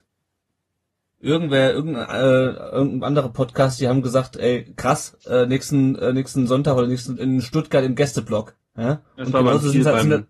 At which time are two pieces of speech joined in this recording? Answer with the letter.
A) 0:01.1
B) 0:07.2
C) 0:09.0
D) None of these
B